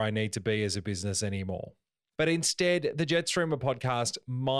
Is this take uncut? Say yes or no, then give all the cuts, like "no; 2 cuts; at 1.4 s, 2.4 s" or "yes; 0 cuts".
no; 1 cut; at 2.2 s